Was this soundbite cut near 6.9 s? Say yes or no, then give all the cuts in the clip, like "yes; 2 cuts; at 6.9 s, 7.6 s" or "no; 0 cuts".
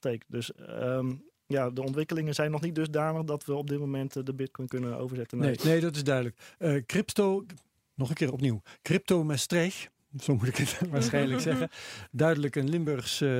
no; 1 cut; at 5.6 s